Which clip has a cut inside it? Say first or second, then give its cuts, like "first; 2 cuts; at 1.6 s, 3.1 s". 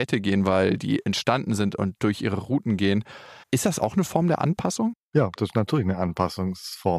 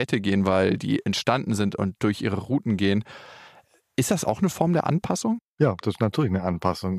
first; 1 cut; at 3.4 s